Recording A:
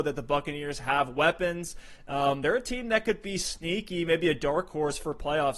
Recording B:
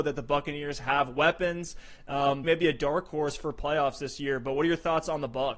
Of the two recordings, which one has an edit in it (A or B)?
B